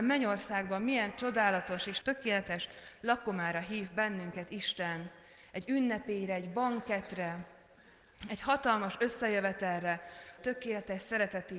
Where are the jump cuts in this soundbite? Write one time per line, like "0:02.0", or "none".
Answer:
0:02.0
0:10.4